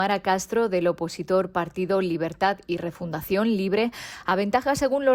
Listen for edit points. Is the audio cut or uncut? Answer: uncut